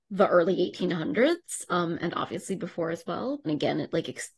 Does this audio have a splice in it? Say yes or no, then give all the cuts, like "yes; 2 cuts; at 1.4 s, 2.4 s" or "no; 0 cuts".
yes; 1 cut; at 3.4 s